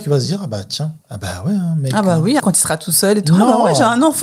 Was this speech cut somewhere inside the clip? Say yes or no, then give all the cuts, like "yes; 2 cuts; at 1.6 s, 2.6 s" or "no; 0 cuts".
yes; 2 cuts; at 1.0 s, 2.4 s